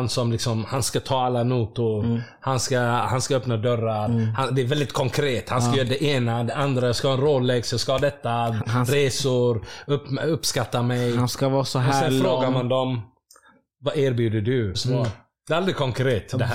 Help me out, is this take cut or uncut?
cut